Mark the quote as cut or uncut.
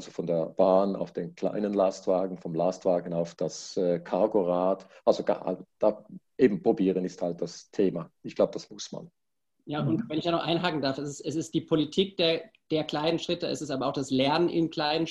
uncut